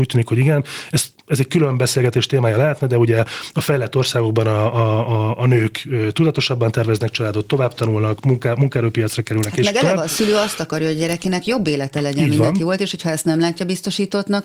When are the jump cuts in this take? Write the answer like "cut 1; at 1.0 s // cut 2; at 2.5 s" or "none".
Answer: none